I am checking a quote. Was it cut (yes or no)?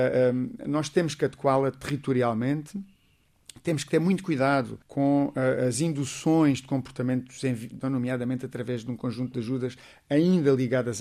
yes